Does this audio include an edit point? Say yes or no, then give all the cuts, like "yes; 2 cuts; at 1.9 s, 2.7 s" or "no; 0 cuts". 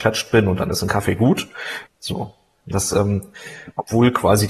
yes; 1 cut; at 1.9 s